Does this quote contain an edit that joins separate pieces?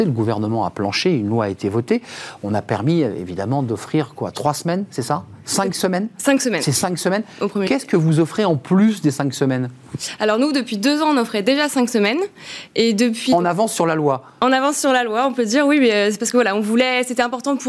no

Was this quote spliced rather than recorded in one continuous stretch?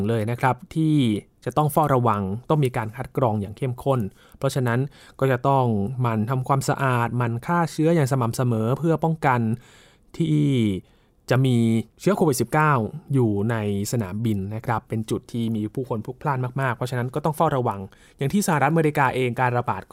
yes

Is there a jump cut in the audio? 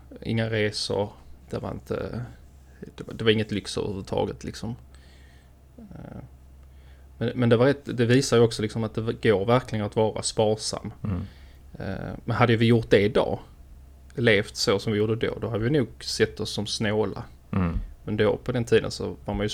no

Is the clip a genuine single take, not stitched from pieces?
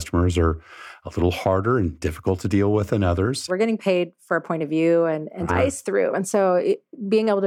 no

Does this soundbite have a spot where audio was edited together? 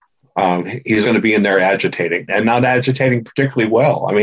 yes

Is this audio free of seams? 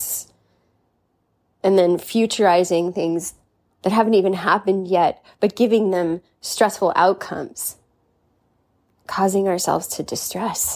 yes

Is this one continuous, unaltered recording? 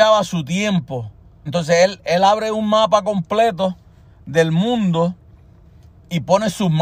no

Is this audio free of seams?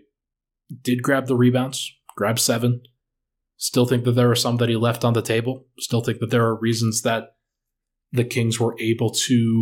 yes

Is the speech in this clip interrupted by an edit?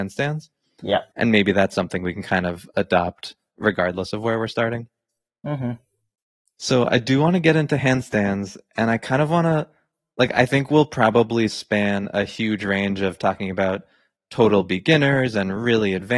yes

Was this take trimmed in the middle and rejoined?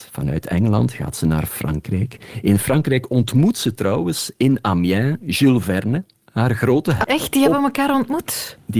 yes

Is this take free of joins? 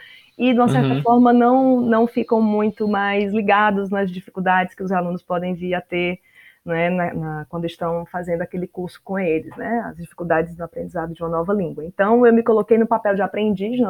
yes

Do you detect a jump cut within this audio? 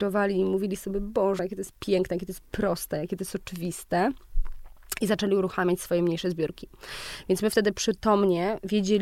no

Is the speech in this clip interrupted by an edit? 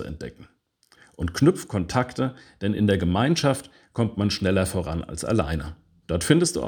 no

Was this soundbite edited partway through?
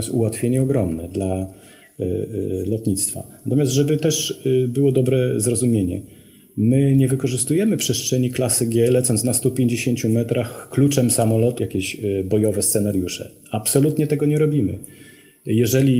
yes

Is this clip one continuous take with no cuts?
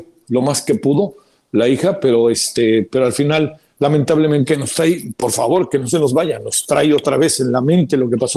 no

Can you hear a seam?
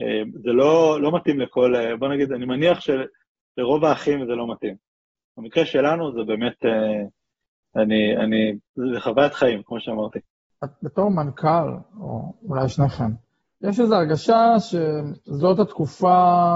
no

